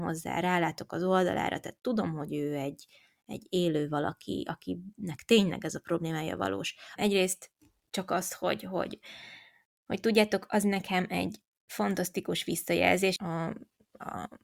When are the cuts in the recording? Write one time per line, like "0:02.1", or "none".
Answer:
0:07.0
0:13.2